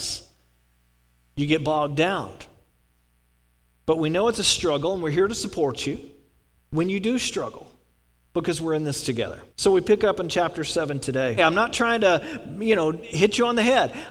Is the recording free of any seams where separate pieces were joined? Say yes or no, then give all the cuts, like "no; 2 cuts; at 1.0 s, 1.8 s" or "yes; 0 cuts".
no; 2 cuts; at 9.5 s, 11.4 s